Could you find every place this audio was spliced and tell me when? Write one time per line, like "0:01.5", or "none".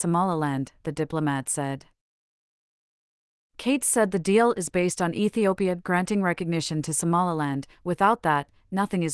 none